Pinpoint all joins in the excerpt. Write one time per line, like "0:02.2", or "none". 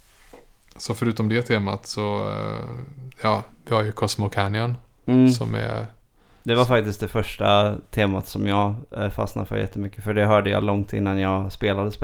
none